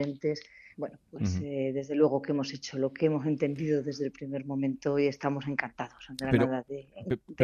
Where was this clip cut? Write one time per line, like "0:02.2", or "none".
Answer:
none